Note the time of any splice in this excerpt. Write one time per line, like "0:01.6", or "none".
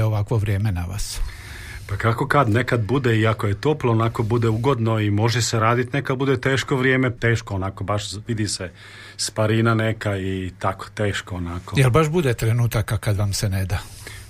0:07.2